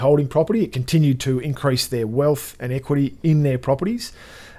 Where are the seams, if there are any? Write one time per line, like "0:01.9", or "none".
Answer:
none